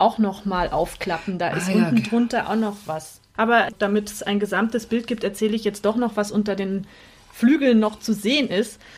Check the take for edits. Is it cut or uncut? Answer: cut